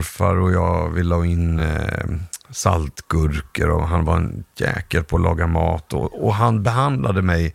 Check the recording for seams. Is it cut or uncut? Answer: uncut